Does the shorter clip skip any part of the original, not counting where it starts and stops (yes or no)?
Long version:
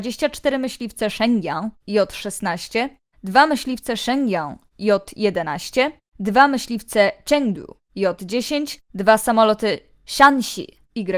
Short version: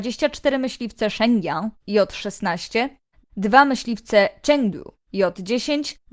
yes